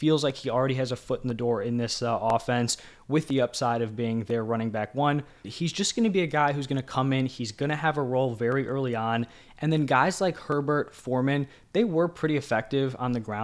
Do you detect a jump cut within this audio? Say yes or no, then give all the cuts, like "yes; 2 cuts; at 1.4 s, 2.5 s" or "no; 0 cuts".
yes; 1 cut; at 5.4 s